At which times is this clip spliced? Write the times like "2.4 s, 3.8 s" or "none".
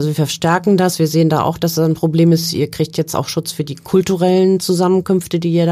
none